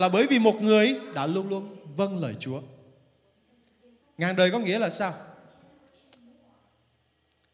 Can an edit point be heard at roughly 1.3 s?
no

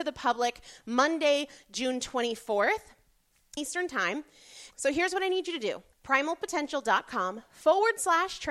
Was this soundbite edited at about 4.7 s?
yes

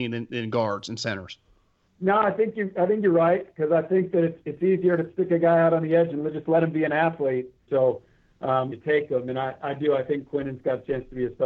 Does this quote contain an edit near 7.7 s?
yes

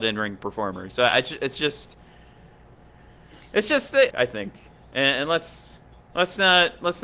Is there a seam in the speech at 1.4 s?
no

